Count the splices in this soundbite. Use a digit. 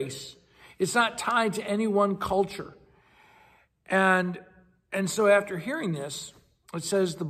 1